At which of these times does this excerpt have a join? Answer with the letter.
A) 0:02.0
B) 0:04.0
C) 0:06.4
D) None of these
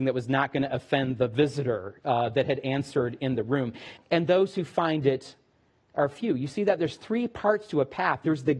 B